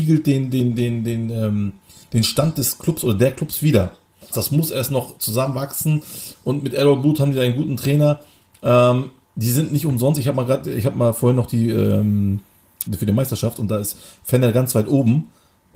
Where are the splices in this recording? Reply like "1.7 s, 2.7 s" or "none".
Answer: 4.3 s, 12.9 s